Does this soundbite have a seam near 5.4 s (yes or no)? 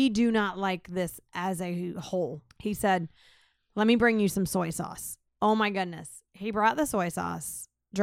yes